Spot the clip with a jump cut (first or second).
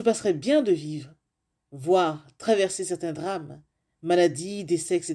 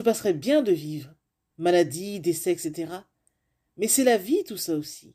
second